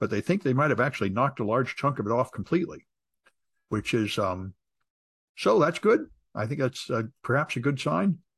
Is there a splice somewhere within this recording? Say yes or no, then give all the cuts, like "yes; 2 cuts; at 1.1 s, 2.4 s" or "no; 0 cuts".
no; 0 cuts